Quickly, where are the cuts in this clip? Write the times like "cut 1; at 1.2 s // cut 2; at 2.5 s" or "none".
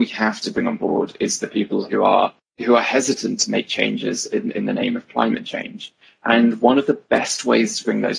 none